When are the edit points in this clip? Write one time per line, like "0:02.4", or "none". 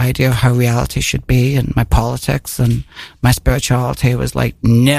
none